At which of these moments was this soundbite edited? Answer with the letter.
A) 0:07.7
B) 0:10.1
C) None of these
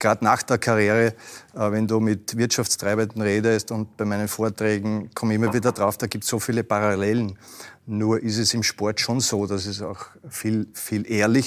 C